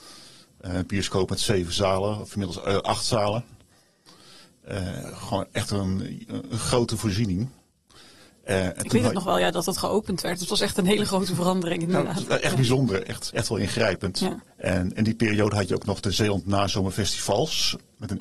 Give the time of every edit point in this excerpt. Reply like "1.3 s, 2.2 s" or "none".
13.3 s